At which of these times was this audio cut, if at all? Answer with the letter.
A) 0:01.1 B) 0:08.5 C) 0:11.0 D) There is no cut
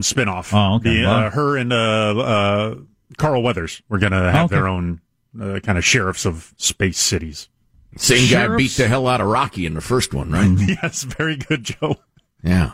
D